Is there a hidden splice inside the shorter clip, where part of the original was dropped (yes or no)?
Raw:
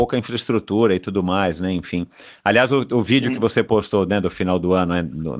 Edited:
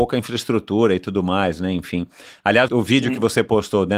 yes